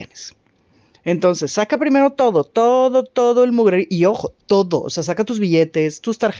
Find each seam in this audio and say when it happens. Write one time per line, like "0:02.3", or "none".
none

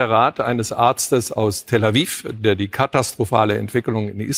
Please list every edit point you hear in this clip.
none

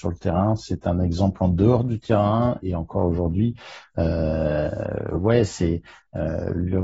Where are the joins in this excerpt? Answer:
0:02.6

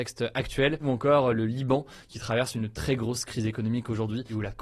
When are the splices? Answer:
none

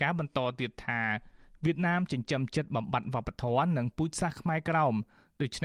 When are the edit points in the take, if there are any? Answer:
none

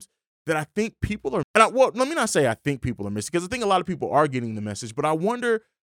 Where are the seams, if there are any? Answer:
0:01.4

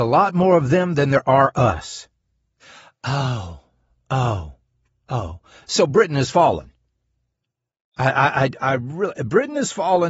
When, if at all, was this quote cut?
none

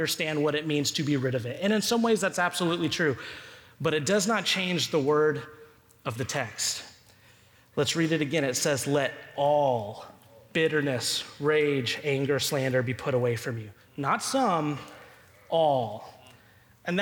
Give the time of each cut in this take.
none

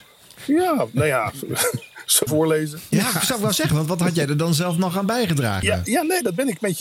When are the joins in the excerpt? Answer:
0:02.3
0:05.6

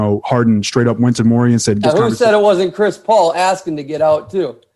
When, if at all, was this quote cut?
0:01.8

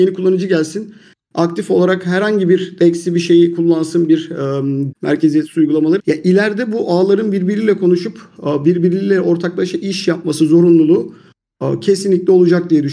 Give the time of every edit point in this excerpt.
0:04.9
0:06.0

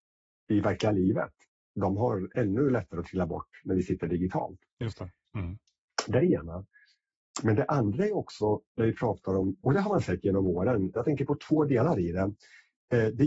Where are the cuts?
0:05.3
0:09.6
0:11.0

